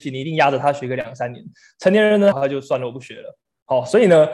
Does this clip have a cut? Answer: yes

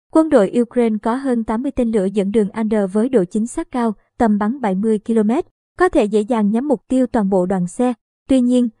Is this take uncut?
no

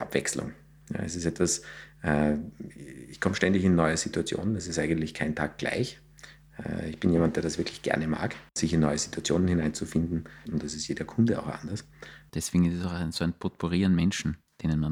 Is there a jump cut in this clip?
yes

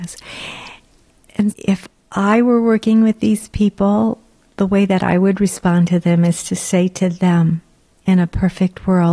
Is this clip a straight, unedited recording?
no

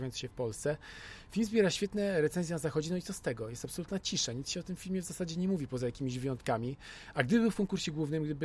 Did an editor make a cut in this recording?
no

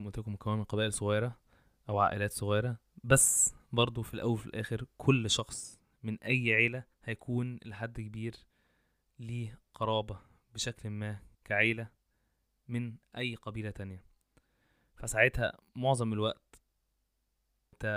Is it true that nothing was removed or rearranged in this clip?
no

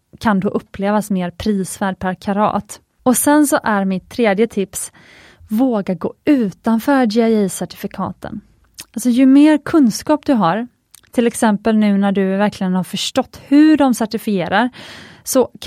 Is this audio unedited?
no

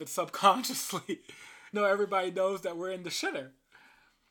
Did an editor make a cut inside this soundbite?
yes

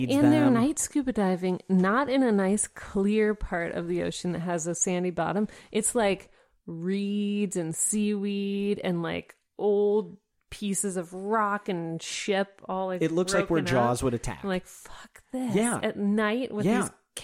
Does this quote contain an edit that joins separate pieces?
no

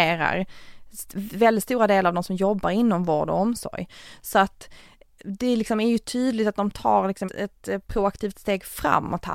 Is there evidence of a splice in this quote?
yes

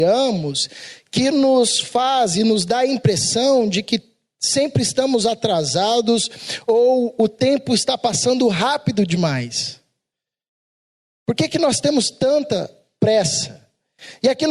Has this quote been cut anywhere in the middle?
no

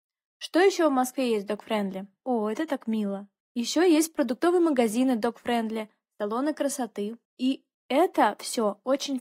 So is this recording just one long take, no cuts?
no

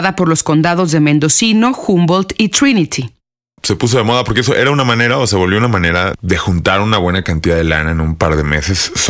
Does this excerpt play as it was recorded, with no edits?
no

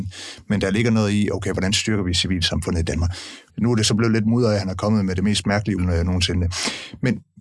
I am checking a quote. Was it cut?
yes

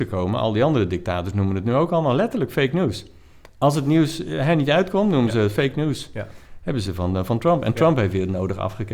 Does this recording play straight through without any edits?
yes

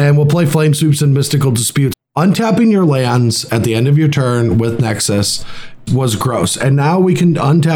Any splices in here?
yes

